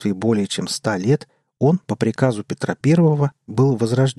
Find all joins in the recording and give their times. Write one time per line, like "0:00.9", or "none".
none